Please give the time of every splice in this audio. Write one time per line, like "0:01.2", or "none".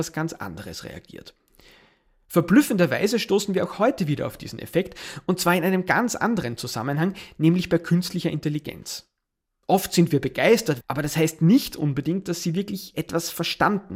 0:10.8